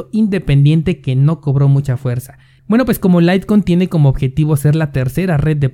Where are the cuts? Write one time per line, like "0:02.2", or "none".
0:02.6

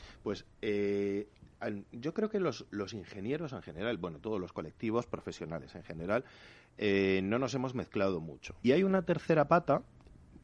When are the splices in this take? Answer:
0:08.6

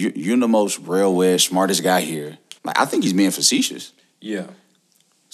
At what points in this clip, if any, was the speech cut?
0:02.6

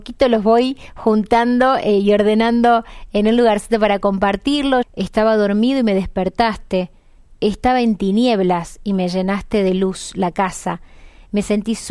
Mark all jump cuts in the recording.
0:04.8

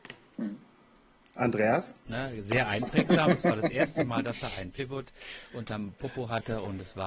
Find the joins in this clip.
0:02.1

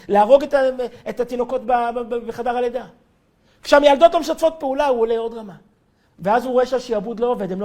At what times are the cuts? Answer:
0:06.1

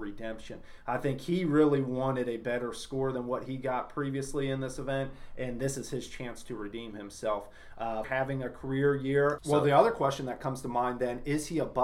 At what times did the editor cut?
0:08.0
0:09.4

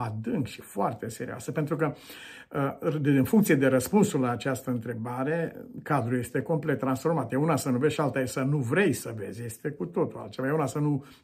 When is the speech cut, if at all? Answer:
none

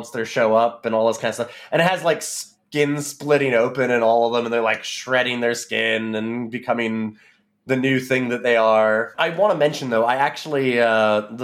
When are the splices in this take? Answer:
0:09.1

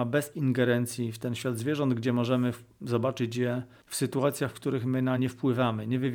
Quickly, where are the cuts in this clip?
0:05.2

